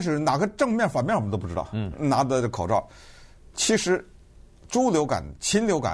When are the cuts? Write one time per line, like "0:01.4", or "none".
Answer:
0:03.5